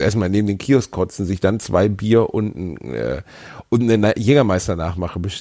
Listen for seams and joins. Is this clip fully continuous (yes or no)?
yes